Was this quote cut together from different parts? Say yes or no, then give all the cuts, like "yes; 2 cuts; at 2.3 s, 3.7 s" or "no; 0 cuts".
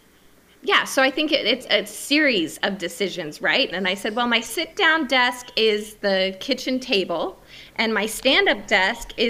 yes; 1 cut; at 3.7 s